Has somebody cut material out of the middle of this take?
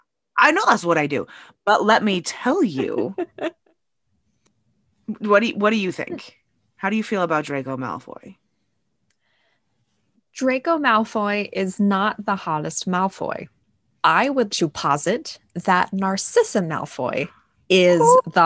yes; 1 cut; at 14.5 s

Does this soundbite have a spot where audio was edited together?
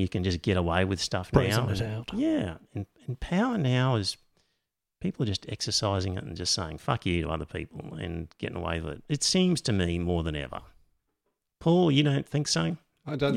no; 0 cuts

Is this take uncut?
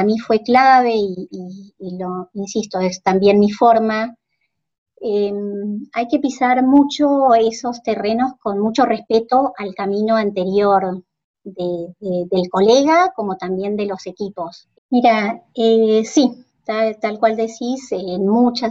no; 1 cut; at 14.7 s

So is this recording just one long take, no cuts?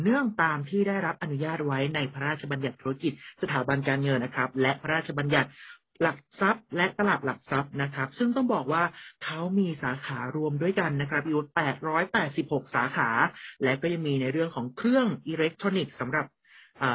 no; 1 cut; at 4.2 s

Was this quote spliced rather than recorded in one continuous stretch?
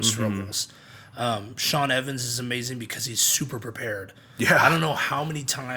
no; 0 cuts

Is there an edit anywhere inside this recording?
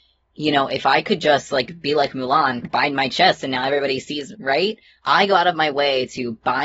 yes; 2 cuts; at 2.6 s, 4.3 s

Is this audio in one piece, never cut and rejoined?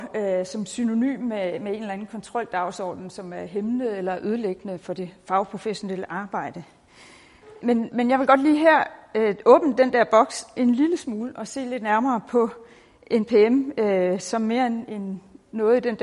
no; 1 cut; at 7.6 s

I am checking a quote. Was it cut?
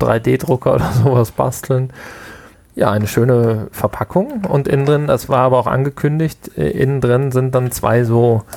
yes; 1 cut; at 2.5 s

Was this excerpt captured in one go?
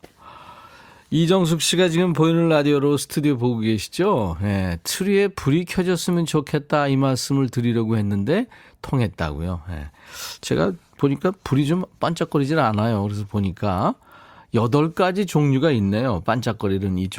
yes; 0 cuts

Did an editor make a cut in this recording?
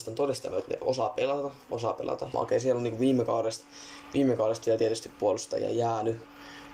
yes; 1 cut; at 2.3 s

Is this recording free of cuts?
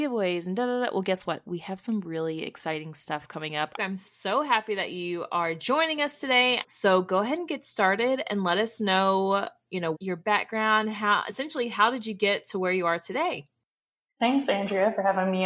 no; 3 cuts; at 3.8 s, 6.6 s, 9.9 s

